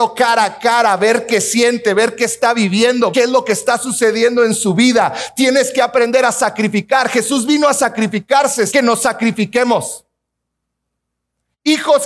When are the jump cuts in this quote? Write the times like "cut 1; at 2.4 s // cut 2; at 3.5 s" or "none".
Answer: cut 1; at 3.1 s // cut 2; at 8.7 s

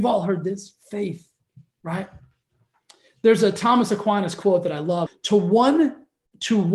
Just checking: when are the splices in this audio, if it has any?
cut 1; at 5.1 s

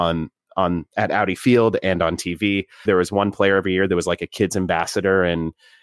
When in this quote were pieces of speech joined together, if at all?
cut 1; at 2.9 s

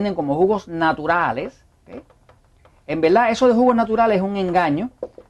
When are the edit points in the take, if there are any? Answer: none

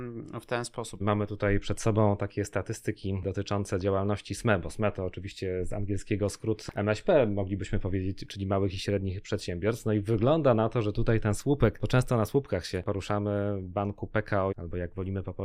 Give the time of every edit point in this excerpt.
cut 1; at 1.0 s // cut 2; at 14.5 s

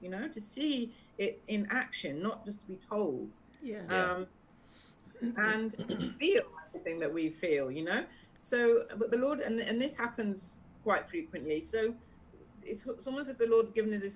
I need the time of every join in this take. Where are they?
none

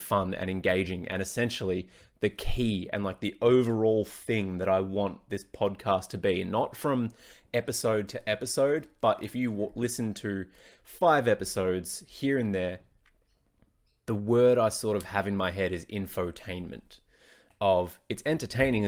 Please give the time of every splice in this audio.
none

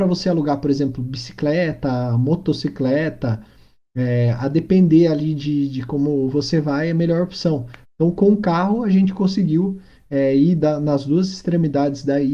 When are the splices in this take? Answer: cut 1; at 7.8 s

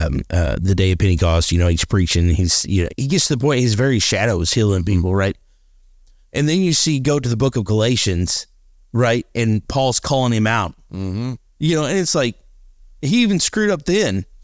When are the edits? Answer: cut 1; at 2.9 s

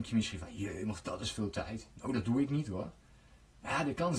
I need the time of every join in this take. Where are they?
none

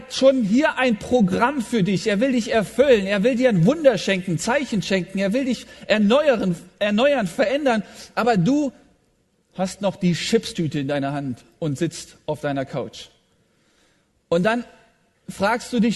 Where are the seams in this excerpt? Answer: none

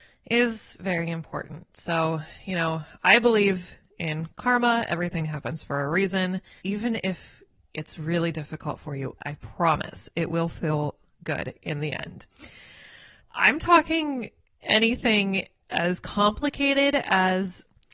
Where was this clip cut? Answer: cut 1; at 6.6 s // cut 2; at 9.2 s // cut 3; at 13.2 s

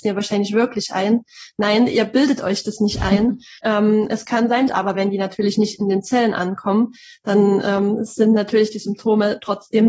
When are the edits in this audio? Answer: cut 1; at 3.6 s // cut 2; at 4.7 s

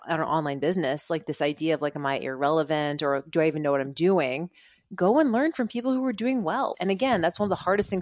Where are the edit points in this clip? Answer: cut 1; at 6.7 s

